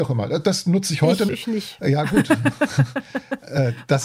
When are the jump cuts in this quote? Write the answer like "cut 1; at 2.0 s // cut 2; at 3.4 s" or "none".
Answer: cut 1; at 1.3 s